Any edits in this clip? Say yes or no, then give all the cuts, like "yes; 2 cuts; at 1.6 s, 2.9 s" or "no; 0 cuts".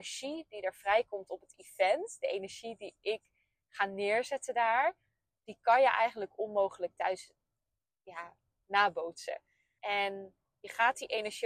yes; 1 cut; at 9.8 s